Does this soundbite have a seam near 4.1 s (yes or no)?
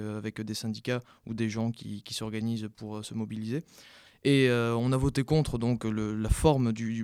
yes